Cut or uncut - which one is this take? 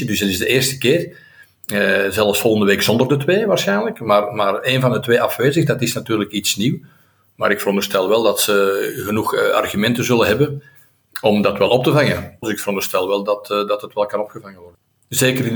cut